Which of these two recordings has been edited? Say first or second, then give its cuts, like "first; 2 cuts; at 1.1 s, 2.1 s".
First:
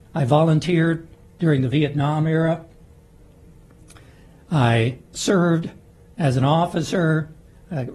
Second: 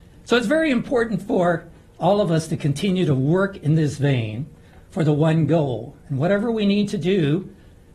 first; 1 cut; at 5.1 s